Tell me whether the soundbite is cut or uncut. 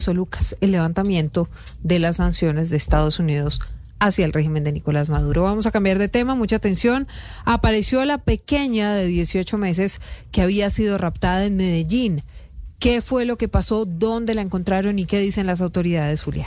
uncut